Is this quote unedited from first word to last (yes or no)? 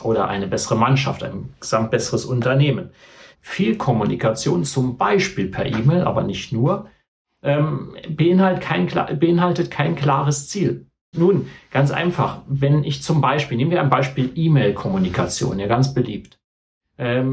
no